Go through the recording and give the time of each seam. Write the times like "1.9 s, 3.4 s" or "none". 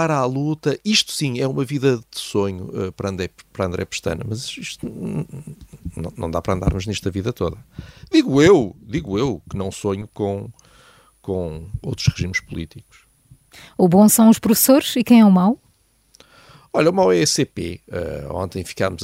none